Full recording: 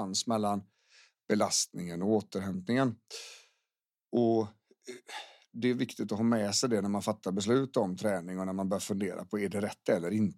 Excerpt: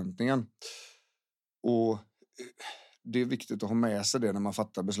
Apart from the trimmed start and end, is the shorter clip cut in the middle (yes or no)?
no